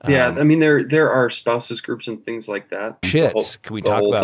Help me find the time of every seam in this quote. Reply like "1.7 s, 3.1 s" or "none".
3.0 s